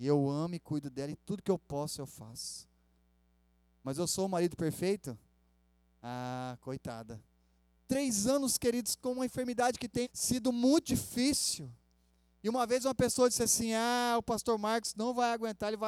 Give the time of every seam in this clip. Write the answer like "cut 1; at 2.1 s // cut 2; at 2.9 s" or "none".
cut 1; at 7.8 s // cut 2; at 10.0 s